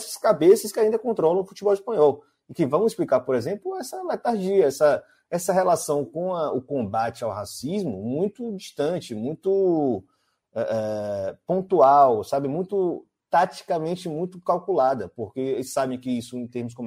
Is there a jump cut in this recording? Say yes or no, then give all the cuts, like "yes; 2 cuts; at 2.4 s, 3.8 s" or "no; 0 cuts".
no; 0 cuts